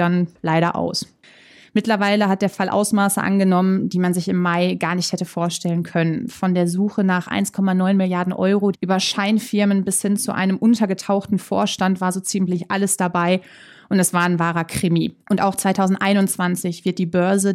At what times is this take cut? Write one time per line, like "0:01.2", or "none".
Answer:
0:08.7
0:15.2